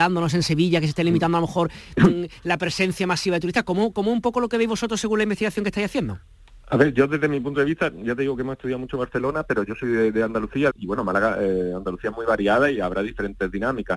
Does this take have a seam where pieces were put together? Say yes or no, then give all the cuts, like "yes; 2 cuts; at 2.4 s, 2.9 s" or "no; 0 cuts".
yes; 1 cut; at 10.7 s